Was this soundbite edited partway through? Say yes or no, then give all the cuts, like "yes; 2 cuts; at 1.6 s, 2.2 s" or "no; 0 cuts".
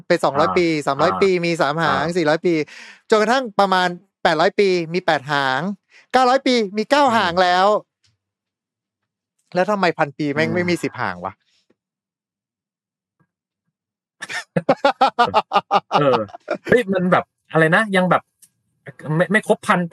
yes; 1 cut; at 15.3 s